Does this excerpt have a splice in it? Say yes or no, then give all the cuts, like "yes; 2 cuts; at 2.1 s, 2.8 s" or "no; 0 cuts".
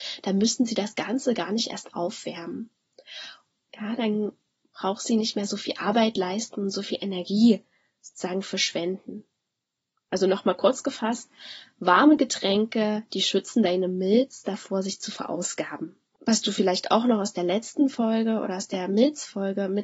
yes; 1 cut; at 3.7 s